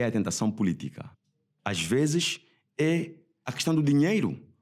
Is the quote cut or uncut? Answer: cut